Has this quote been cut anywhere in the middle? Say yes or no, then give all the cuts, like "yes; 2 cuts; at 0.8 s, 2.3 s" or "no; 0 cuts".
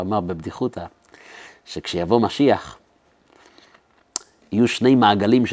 no; 0 cuts